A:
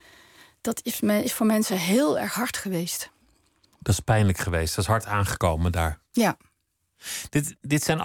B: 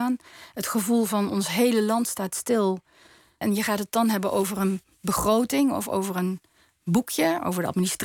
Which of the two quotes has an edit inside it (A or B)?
B